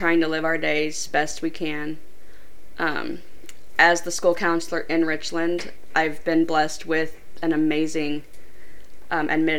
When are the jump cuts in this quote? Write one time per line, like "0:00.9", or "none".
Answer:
none